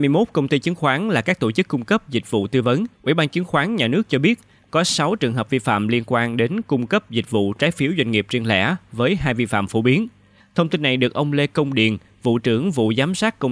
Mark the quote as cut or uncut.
cut